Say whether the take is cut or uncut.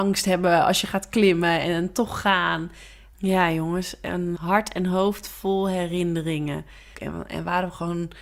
cut